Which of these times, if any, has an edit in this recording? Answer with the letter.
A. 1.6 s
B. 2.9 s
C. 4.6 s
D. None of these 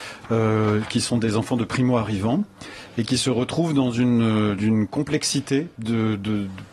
C